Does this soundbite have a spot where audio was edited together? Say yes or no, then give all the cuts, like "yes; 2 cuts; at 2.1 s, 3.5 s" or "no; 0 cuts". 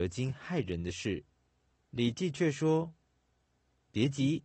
yes; 1 cut; at 1.8 s